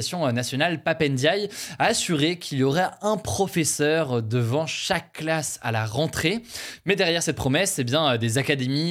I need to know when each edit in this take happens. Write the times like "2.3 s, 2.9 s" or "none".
none